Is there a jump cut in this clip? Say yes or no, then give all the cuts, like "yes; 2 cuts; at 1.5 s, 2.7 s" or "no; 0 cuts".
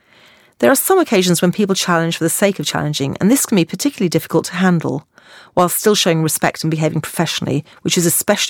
no; 0 cuts